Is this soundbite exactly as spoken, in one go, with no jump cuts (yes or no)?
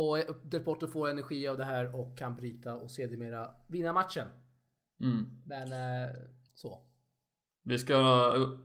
no